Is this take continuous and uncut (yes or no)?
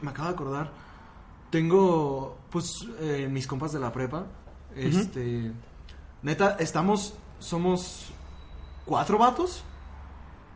yes